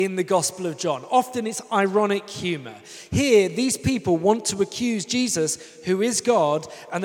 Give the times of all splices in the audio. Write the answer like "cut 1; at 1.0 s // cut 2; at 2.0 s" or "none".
none